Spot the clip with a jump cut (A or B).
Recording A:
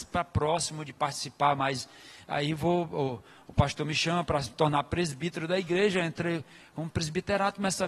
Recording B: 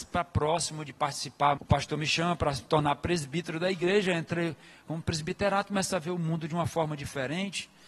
B